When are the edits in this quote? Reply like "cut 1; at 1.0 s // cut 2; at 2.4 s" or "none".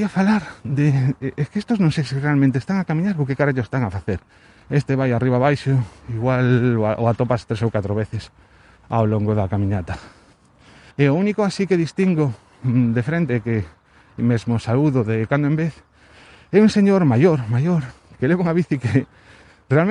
cut 1; at 4.6 s // cut 2; at 10.9 s